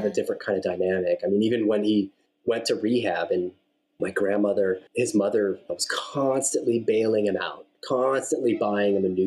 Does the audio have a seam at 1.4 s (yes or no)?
no